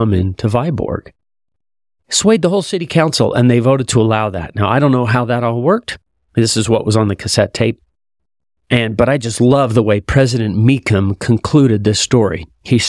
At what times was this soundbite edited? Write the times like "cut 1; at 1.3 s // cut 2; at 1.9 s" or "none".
none